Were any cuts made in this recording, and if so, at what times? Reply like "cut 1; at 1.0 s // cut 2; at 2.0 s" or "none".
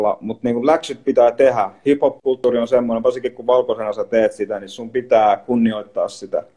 none